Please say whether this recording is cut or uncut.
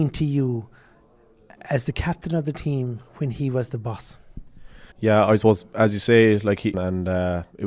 cut